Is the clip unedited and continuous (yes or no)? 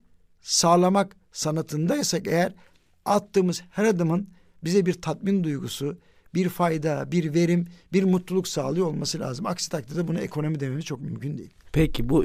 yes